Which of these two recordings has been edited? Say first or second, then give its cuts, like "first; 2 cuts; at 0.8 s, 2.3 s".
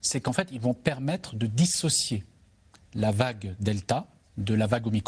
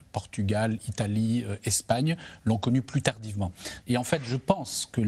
second; 1 cut; at 3.8 s